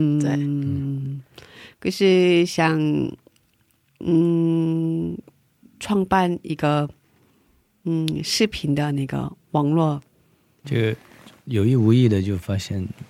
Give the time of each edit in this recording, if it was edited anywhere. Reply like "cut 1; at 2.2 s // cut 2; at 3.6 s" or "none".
cut 1; at 10.6 s